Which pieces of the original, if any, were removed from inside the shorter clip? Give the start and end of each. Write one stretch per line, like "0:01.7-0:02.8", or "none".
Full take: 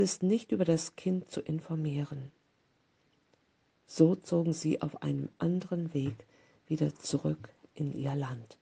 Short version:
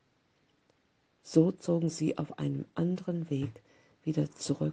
none